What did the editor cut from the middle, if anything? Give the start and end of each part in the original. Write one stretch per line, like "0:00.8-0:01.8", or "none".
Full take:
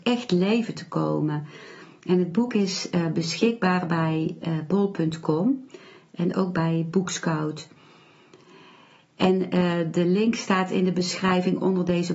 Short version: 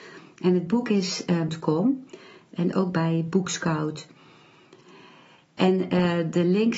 0:03.1-0:05.1

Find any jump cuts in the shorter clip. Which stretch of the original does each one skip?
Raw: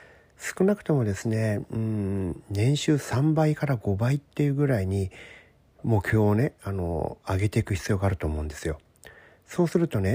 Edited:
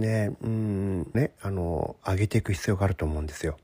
0:02.4-0:06.4

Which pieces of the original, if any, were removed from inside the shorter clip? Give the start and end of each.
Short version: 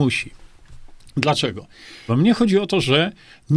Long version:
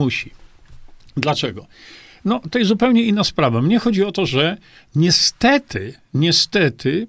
0:02.1-0:03.5

